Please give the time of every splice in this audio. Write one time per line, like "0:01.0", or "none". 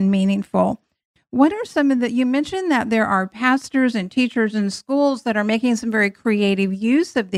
none